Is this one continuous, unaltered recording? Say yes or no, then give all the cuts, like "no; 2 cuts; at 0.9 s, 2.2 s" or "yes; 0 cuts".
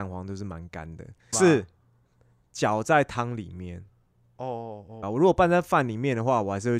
no; 2 cuts; at 1.3 s, 5.0 s